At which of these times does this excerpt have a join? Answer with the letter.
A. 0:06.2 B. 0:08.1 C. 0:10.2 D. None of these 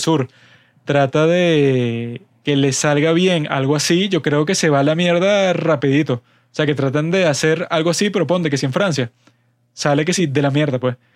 D